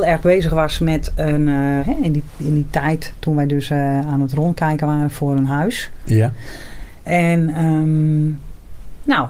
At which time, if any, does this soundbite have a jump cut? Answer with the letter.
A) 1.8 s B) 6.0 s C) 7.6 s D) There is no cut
A